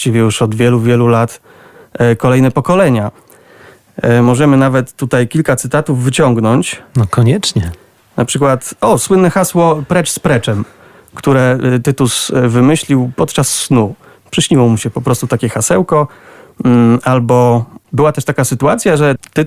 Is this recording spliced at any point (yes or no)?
no